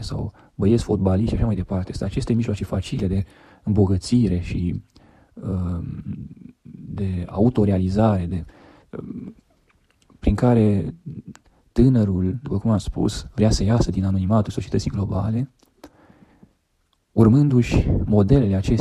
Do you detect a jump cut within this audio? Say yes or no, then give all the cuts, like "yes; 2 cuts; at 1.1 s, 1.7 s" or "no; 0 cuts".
no; 0 cuts